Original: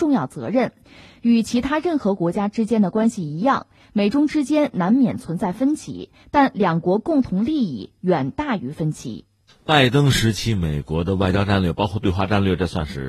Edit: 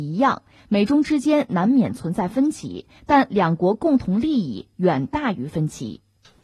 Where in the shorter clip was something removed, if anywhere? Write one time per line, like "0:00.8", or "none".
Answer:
none